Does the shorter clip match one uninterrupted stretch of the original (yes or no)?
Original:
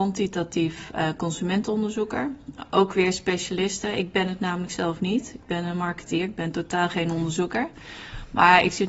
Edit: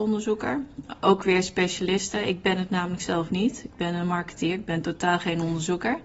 yes